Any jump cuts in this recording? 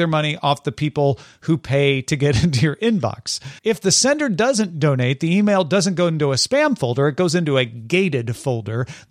yes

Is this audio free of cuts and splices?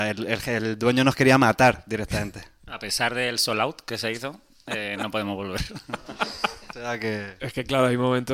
yes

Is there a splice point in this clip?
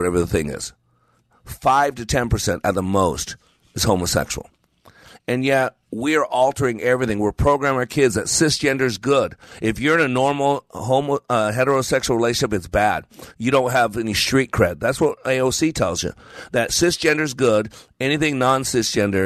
no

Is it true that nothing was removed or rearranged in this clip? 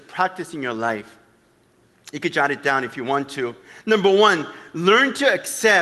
yes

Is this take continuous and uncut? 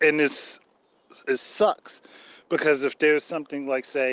yes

